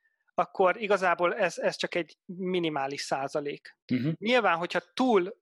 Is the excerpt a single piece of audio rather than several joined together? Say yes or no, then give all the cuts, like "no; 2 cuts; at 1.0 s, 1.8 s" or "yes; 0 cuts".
no; 1 cut; at 3.8 s